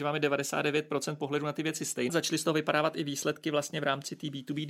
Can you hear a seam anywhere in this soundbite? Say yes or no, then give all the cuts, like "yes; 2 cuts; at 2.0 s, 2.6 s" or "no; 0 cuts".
yes; 1 cut; at 2.1 s